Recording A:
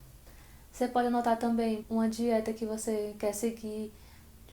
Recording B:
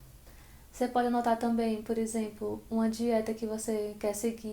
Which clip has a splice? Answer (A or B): A